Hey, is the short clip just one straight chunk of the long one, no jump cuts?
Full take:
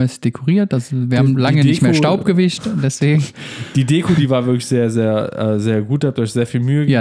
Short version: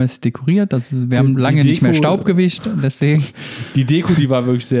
yes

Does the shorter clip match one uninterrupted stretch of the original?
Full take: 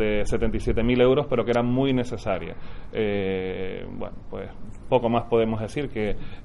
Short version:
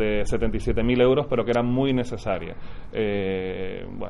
yes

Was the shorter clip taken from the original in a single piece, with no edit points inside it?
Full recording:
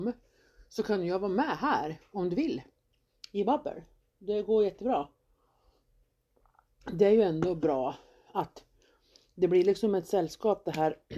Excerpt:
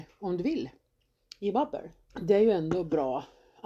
no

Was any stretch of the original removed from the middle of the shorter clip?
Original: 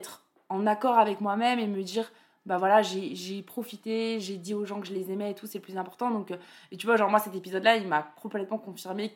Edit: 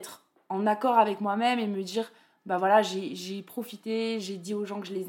no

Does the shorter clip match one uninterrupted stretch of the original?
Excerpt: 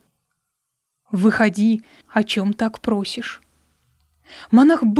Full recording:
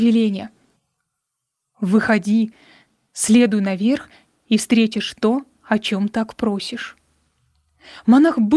no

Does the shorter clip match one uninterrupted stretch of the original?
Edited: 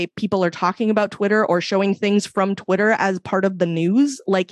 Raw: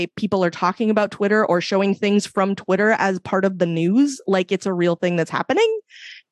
yes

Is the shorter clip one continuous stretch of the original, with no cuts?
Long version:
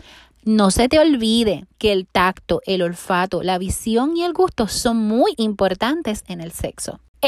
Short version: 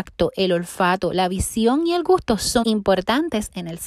no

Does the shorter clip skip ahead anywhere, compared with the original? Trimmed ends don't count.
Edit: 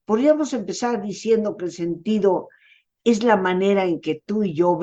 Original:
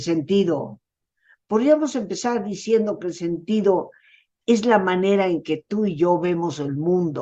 no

